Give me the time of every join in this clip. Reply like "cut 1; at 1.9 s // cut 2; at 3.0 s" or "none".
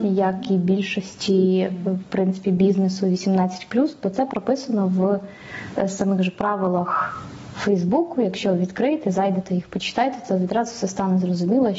none